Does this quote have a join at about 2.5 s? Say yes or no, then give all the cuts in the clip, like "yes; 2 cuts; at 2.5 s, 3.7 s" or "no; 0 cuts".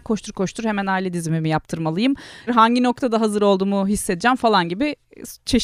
yes; 1 cut; at 2.5 s